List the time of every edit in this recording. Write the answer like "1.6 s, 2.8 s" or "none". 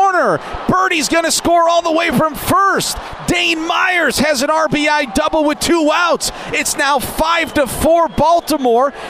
none